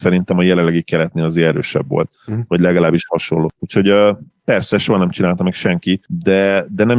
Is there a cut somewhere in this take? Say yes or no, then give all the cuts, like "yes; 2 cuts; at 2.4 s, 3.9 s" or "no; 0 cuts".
no; 0 cuts